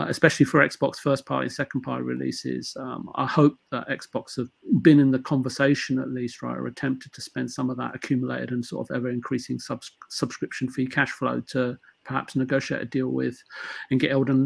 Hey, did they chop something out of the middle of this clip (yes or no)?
no